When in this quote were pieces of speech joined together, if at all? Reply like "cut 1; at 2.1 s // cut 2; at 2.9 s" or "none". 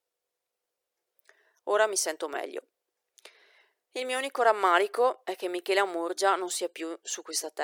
none